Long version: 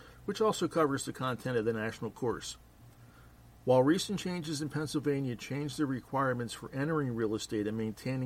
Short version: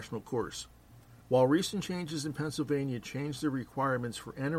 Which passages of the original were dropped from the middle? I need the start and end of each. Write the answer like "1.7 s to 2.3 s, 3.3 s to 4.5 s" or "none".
3.1 s to 3.6 s